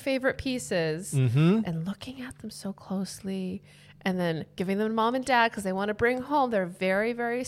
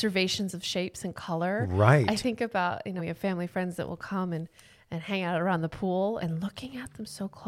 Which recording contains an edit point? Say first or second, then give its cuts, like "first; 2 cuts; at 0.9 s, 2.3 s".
second; 2 cuts; at 3.0 s, 6.2 s